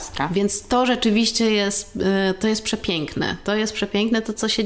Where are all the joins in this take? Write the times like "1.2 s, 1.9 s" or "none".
none